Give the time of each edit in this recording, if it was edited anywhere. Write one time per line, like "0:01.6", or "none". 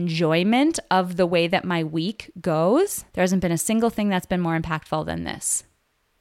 0:03.1